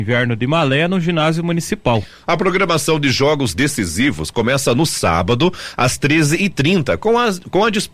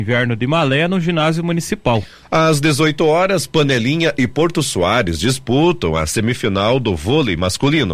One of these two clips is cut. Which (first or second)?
second